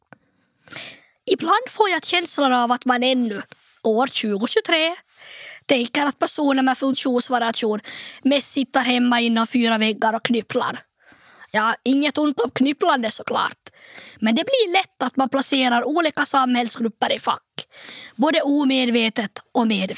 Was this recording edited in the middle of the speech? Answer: no; 0 cuts

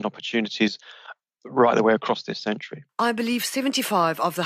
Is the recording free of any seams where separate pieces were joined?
yes; 0 cuts

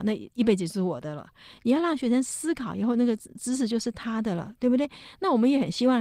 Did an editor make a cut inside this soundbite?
no; 0 cuts

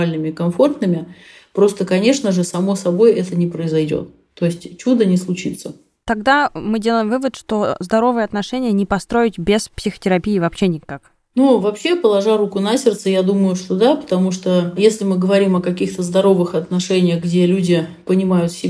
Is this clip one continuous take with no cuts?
yes; 0 cuts

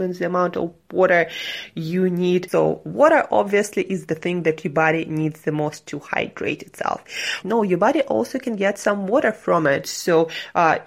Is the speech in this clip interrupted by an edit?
yes; 3 cuts; at 2.5 s, 7.4 s, 9.8 s

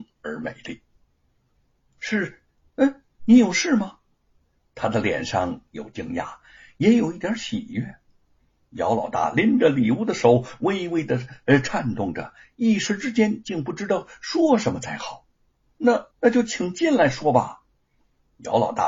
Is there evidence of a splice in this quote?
yes; 2 cuts; at 3.2 s, 16.1 s

